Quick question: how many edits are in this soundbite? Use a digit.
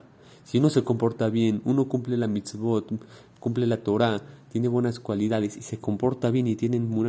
0